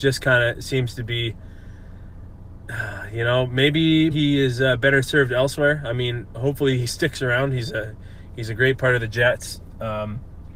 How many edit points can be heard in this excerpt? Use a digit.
1